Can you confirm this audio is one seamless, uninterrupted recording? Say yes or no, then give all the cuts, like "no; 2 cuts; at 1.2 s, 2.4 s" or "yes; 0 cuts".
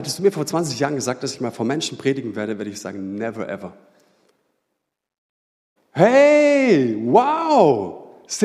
no; 1 cut; at 5.8 s